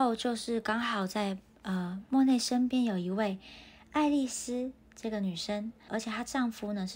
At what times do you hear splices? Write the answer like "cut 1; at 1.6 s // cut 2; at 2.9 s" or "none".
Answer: cut 1; at 5.9 s

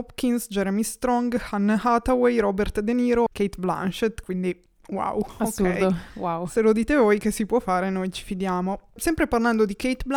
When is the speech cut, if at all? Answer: cut 1; at 3.3 s

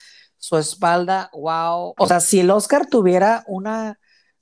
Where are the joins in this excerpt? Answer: cut 1; at 2.0 s

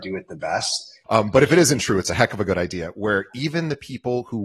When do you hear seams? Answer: cut 1; at 1.0 s

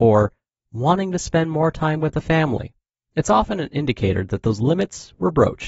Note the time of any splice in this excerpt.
none

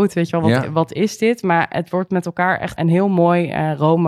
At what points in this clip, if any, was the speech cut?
cut 1; at 2.8 s

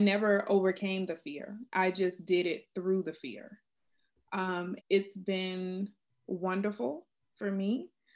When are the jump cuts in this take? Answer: cut 1; at 4.8 s

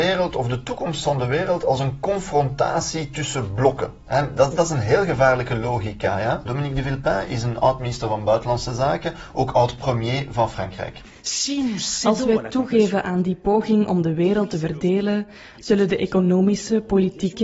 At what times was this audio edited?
cut 1; at 4.5 s // cut 2; at 6.5 s

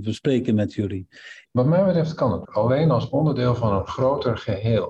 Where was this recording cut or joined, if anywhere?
cut 1; at 1.4 s // cut 2; at 2.4 s

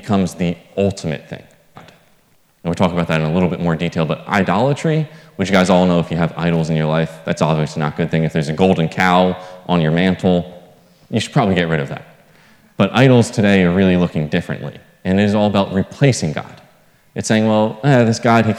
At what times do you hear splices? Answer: cut 1; at 1.7 s

